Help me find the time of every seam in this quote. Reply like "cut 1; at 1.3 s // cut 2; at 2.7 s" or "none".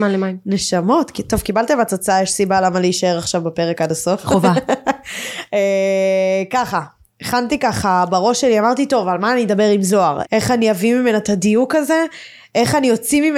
cut 1; at 10.2 s